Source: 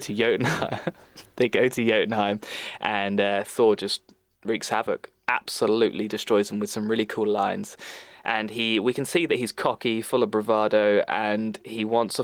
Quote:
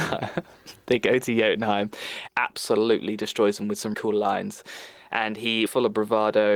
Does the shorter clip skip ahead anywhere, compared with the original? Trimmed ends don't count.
yes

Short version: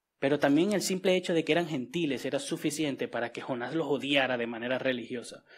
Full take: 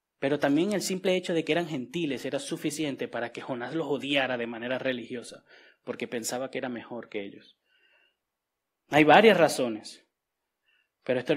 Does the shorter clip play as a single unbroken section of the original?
yes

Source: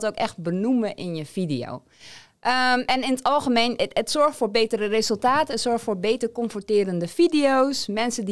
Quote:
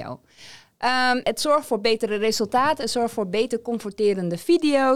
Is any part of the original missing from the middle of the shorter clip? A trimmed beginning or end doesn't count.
yes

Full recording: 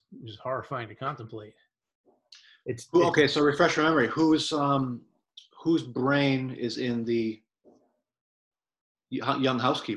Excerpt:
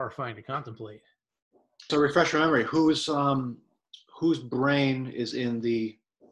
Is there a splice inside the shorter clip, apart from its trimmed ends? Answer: yes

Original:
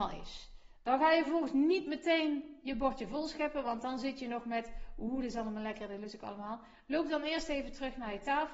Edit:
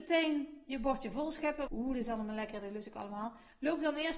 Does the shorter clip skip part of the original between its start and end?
yes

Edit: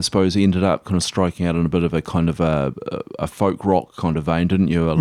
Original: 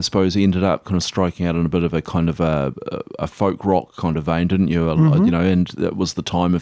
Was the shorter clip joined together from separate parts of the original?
no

